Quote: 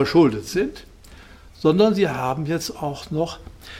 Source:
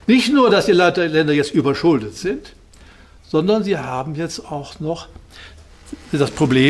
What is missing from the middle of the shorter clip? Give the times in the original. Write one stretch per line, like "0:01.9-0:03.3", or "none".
none